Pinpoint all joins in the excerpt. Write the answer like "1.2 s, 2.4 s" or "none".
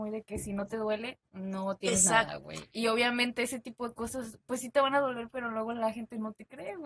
none